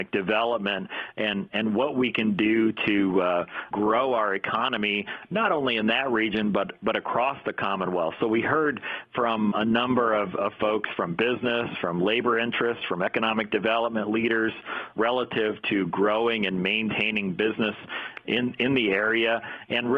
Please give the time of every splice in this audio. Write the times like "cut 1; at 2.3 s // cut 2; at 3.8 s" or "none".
none

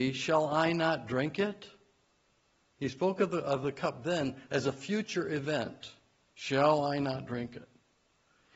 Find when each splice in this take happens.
none

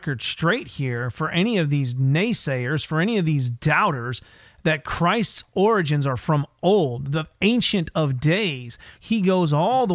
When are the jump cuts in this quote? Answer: cut 1; at 8.9 s

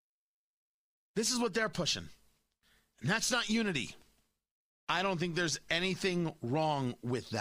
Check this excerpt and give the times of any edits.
cut 1; at 4.7 s

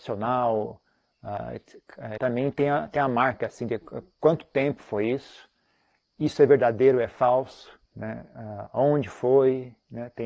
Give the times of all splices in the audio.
cut 1; at 2.2 s // cut 2; at 7.9 s

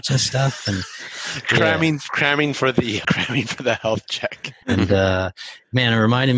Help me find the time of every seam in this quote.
cut 1; at 3.0 s // cut 2; at 4.6 s

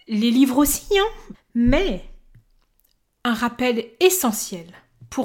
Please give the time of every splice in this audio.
cut 1; at 1.3 s

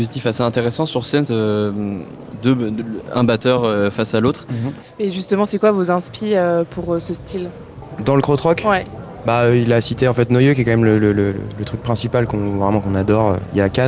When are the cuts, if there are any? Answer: cut 1; at 1.3 s // cut 2; at 4.8 s

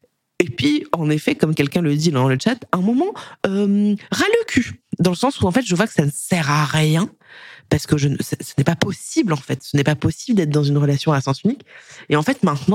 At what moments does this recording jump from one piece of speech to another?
none

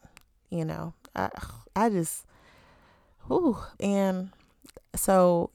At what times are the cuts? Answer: cut 1; at 3.8 s

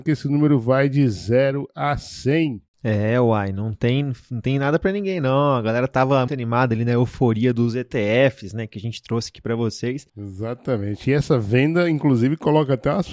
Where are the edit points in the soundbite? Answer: cut 1; at 6.3 s // cut 2; at 10.1 s

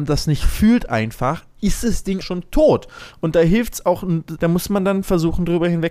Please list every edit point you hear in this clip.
cut 1; at 2.2 s // cut 2; at 4.4 s

